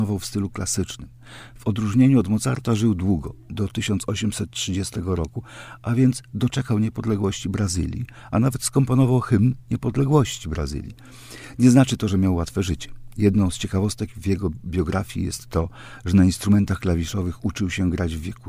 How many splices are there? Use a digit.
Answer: 0